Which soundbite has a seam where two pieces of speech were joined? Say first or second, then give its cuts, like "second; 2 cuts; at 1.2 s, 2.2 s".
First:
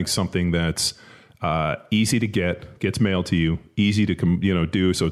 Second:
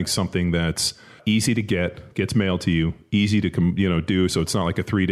second; 1 cut; at 1.2 s